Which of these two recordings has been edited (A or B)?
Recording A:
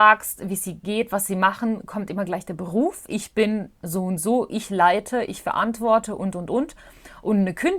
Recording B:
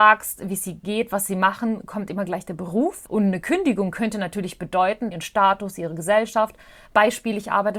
B